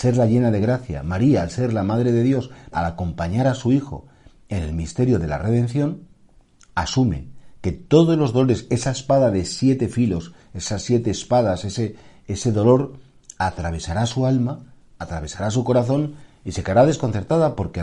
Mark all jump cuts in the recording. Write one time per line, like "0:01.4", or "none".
0:02.7